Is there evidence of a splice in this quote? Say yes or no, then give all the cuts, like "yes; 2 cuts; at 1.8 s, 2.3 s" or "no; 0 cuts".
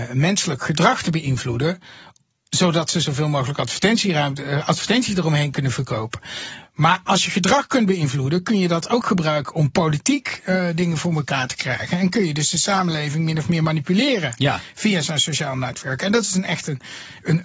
no; 0 cuts